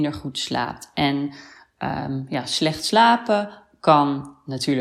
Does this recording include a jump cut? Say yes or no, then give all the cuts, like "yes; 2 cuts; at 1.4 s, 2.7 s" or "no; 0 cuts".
no; 0 cuts